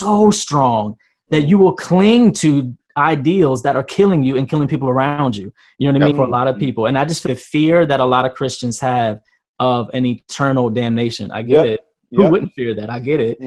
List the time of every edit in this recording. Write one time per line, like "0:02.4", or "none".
0:06.1
0:07.3